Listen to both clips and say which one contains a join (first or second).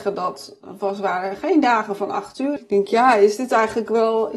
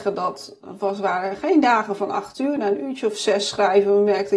first